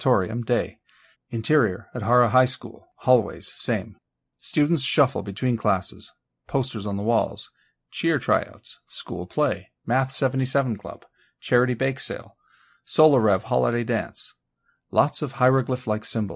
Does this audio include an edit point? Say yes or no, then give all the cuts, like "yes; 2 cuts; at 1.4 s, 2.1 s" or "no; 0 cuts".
yes; 1 cut; at 1.1 s